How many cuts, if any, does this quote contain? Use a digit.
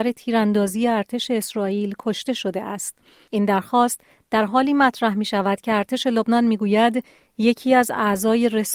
1